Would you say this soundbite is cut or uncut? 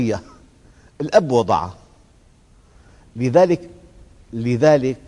uncut